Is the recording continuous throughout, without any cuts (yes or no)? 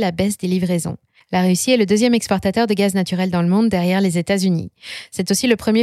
no